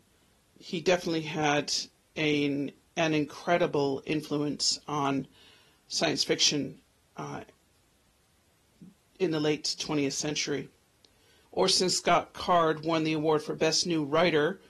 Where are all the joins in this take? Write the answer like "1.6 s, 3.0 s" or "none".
11.4 s